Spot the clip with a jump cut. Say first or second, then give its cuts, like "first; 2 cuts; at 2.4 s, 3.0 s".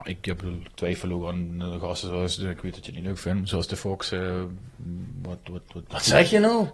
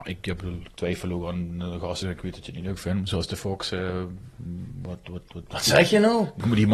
second; 1 cut; at 2.0 s